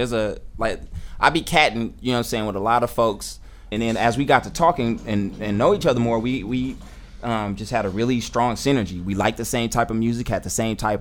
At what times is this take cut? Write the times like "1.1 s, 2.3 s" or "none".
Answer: 3.7 s